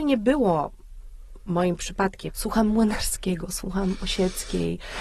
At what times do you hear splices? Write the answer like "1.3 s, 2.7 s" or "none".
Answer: 2.3 s